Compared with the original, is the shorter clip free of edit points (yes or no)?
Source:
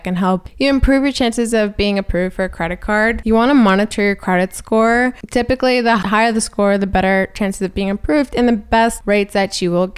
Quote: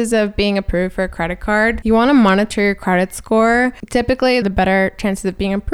no